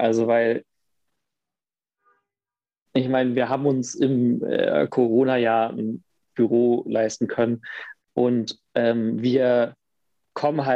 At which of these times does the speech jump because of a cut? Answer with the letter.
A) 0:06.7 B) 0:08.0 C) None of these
B